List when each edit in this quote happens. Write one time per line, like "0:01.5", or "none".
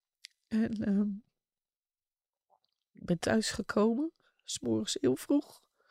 none